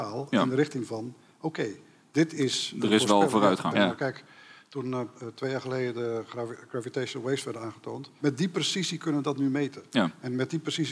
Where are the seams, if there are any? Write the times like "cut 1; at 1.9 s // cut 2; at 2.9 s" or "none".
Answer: cut 1; at 3.7 s // cut 2; at 8.2 s